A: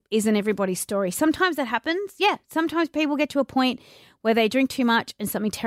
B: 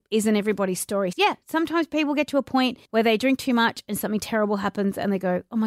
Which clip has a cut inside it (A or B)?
B